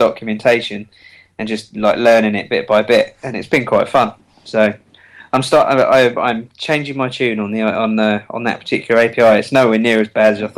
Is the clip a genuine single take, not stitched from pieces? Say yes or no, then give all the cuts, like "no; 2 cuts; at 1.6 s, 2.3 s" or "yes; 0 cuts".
yes; 0 cuts